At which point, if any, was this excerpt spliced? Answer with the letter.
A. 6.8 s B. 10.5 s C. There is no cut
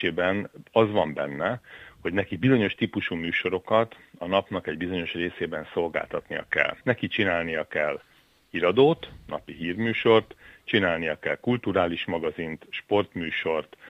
A